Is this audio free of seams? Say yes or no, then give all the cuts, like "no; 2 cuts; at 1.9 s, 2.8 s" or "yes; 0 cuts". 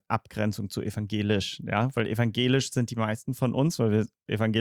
yes; 0 cuts